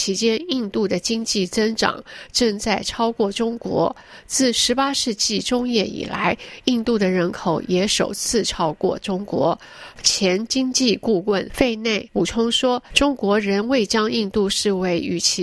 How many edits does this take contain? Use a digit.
1